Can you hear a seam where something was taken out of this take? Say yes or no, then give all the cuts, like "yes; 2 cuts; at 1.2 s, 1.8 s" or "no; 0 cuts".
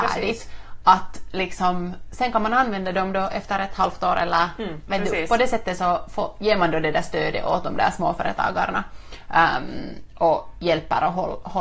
no; 0 cuts